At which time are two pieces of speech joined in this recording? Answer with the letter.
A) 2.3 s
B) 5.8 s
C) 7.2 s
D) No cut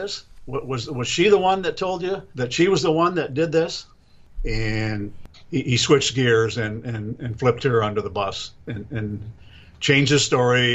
A